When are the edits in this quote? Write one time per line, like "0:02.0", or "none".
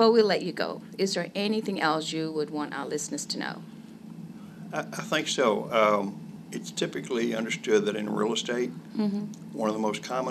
none